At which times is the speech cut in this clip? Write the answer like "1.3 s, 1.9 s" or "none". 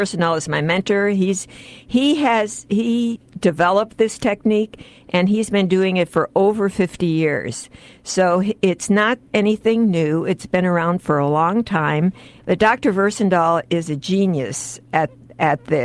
12.4 s